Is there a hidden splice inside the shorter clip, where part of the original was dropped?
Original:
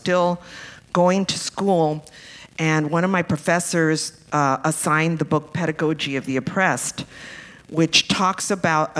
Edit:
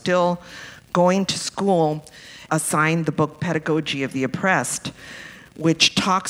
yes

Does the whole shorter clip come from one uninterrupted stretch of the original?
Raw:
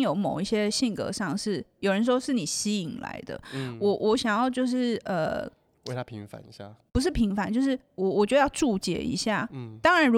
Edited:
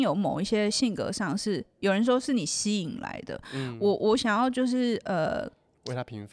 yes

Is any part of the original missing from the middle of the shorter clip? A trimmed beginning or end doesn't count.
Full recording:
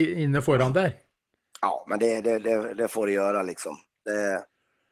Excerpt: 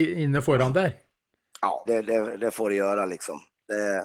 yes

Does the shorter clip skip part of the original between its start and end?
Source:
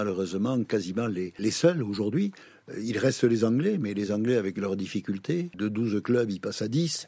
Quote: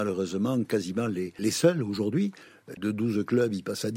yes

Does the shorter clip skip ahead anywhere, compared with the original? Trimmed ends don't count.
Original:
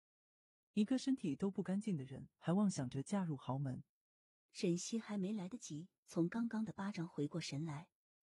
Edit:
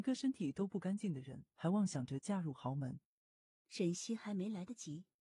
no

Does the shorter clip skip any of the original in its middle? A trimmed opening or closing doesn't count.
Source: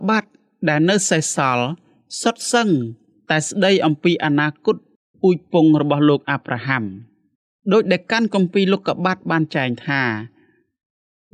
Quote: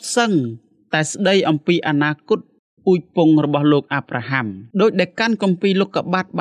yes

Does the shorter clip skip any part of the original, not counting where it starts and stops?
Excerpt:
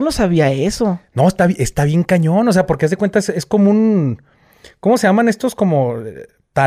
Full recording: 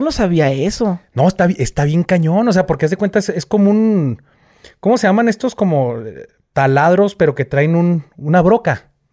no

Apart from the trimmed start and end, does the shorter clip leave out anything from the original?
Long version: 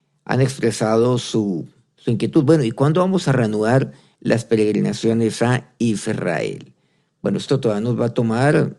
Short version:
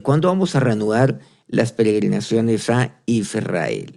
no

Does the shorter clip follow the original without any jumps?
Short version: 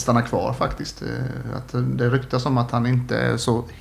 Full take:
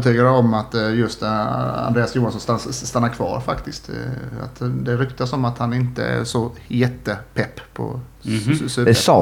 yes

